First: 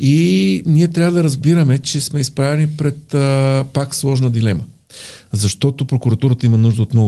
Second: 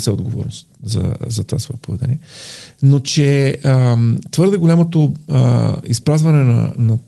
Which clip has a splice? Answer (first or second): first